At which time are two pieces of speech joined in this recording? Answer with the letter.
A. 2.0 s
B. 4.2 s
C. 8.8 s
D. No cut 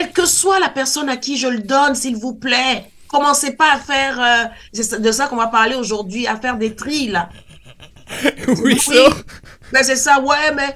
C